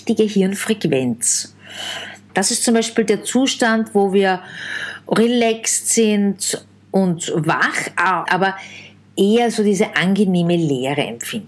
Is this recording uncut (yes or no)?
no